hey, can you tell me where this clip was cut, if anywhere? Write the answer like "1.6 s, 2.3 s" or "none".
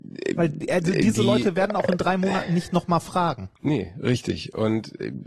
3.6 s